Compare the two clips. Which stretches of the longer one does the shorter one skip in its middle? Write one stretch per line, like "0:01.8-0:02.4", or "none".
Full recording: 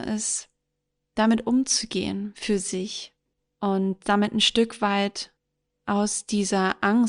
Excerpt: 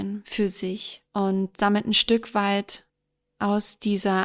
0:03.2-0:03.5